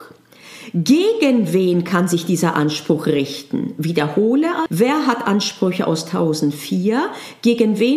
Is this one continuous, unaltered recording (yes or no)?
no